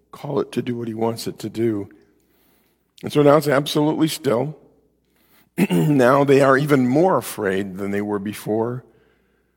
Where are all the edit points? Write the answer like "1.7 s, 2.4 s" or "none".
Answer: none